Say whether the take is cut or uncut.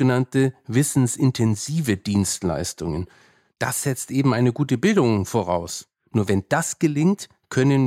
uncut